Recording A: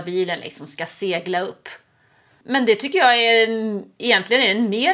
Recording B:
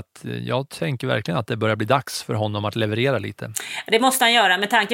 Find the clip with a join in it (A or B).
A